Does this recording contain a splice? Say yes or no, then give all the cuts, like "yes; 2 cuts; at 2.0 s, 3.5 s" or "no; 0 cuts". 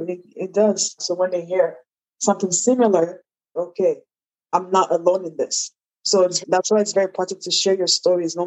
yes; 3 cuts; at 1.0 s, 3.6 s, 6.4 s